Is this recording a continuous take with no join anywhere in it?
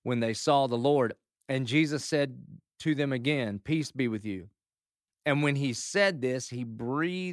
no; 1 cut; at 5.1 s

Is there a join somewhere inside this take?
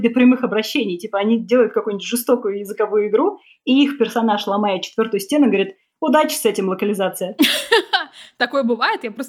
no; 0 cuts

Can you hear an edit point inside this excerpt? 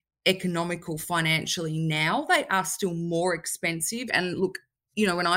yes; 1 cut; at 4.1 s

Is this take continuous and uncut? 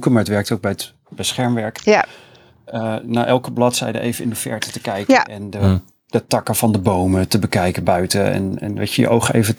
yes; 0 cuts

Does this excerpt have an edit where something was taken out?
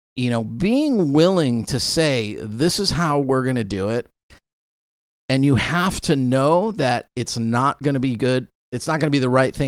no; 0 cuts

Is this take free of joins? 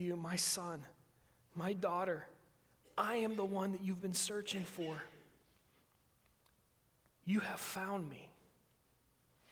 yes; 0 cuts

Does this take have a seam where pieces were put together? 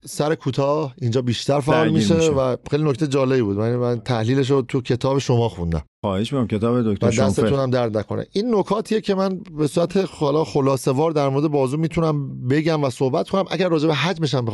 yes; 1 cut; at 5.9 s

